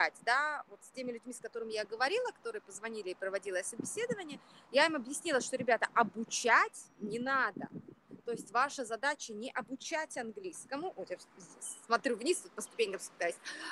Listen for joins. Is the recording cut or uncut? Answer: uncut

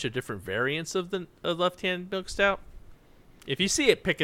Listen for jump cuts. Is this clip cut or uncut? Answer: uncut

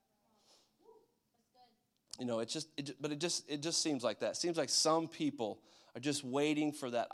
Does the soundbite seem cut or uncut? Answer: uncut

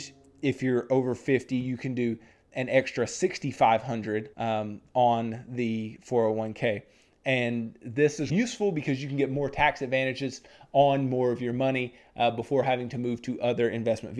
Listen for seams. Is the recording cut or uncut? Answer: cut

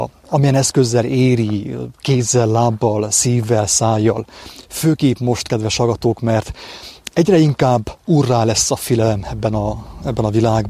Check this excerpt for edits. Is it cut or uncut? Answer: uncut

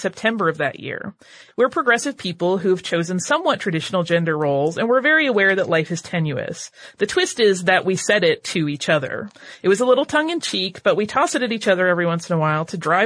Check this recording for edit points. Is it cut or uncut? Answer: cut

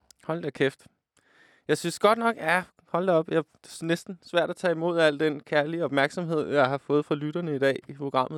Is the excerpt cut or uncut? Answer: uncut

